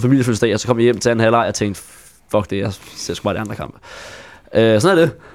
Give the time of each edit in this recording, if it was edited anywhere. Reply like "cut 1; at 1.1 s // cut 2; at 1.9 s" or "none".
none